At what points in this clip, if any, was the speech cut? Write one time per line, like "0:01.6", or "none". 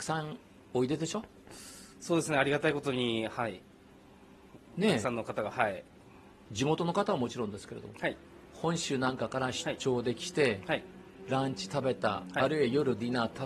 none